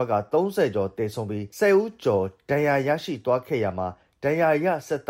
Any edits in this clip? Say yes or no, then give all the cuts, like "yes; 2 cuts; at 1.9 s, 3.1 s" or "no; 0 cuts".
no; 0 cuts